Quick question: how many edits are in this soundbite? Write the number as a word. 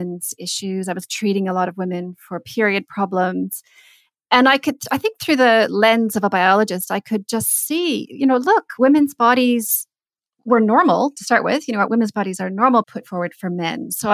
one